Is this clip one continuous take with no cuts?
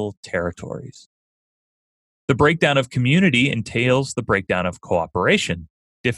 yes; 0 cuts

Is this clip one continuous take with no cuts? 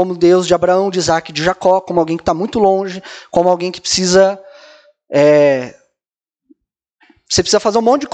yes; 0 cuts

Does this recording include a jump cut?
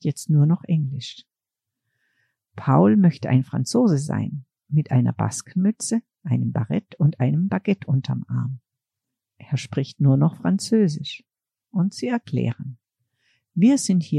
yes; 1 cut; at 11.6 s

